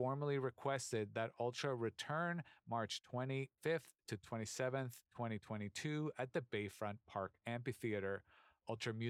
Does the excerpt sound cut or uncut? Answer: cut